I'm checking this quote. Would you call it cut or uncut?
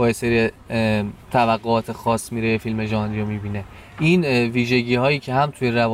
cut